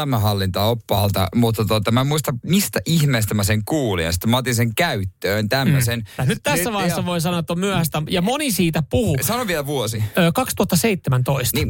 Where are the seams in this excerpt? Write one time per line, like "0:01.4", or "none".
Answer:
0:06.2